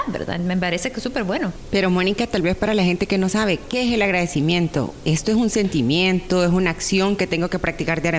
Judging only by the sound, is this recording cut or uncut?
uncut